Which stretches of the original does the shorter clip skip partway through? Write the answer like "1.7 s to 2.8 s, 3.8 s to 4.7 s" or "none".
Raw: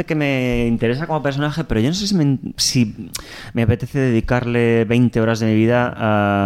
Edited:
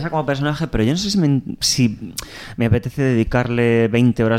none